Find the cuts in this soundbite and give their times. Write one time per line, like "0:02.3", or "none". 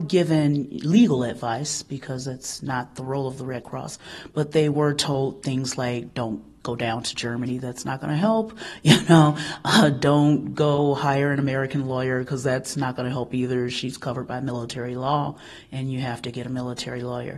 none

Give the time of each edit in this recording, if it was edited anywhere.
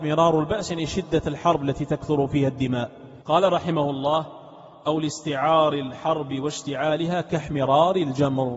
0:03.2

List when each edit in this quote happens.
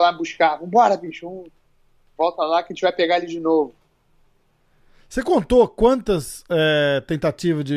none

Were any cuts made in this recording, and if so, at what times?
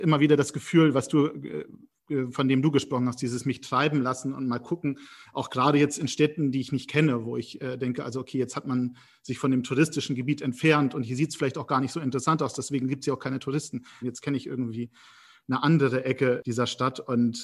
0:14.0

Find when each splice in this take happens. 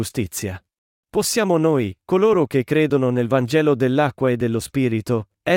0:00.9

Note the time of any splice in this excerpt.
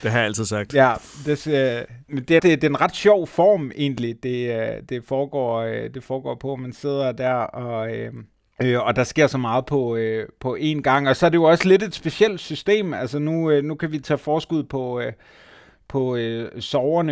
0:02.4

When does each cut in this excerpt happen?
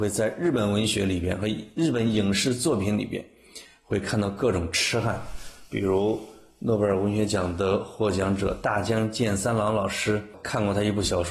none

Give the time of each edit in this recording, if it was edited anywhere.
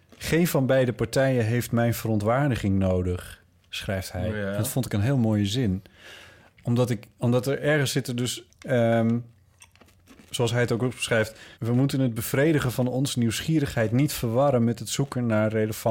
0:08.5
0:11.5

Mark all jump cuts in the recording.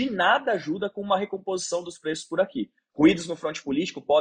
0:02.9

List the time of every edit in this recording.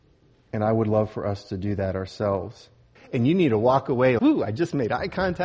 0:02.9
0:04.2

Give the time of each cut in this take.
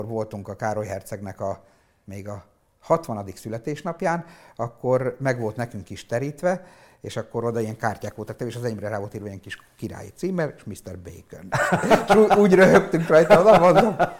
none

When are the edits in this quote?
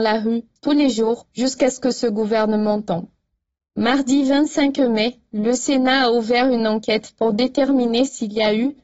none

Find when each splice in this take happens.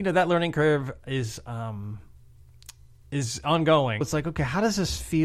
0:04.0

